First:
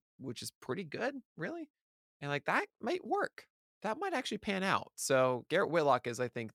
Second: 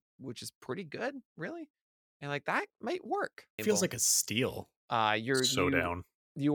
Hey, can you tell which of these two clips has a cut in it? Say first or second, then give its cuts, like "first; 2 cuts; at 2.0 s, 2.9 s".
second; 2 cuts; at 3.6 s, 4.8 s